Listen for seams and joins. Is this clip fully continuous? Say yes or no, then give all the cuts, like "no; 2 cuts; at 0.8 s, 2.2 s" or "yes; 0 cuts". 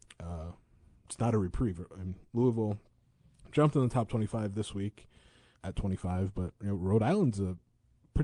no; 1 cut; at 5.5 s